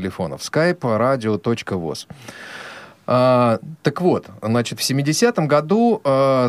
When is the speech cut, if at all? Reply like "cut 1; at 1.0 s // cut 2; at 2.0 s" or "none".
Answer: none